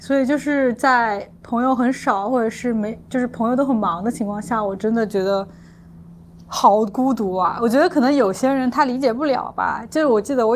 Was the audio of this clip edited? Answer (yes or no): no